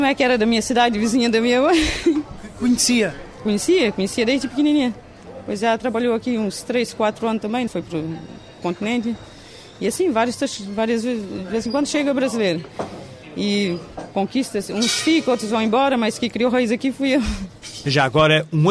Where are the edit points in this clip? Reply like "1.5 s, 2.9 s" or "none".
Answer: 7.7 s